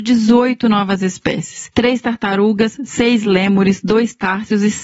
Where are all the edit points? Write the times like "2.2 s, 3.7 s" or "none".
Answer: none